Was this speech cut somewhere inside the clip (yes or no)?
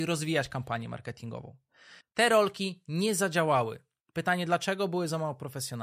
yes